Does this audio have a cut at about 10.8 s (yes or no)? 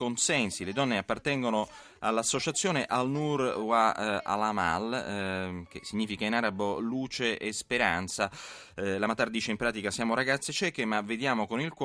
no